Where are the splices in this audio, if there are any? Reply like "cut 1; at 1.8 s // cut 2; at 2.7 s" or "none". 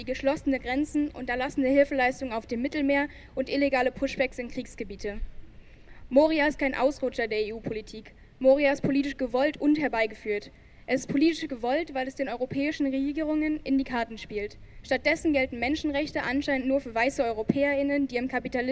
cut 1; at 14.8 s